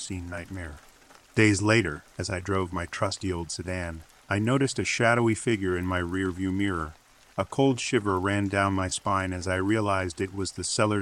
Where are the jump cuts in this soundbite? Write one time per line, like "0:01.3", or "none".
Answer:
none